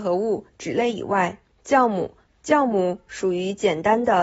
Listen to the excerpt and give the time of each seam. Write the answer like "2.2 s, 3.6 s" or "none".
2.3 s